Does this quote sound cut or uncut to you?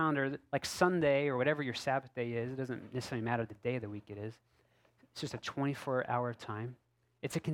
uncut